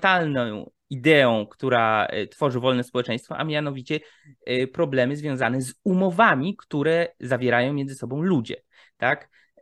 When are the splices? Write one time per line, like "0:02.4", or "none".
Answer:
none